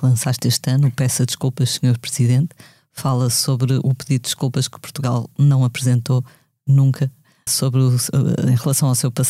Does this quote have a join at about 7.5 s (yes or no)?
yes